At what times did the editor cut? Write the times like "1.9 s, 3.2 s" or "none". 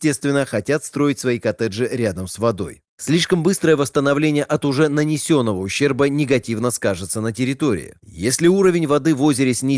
2.8 s, 8.0 s